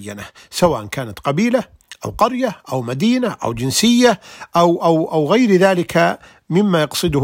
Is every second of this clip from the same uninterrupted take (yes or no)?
yes